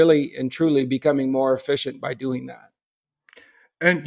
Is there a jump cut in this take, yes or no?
no